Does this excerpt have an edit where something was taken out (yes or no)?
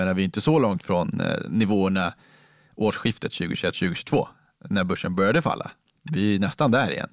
no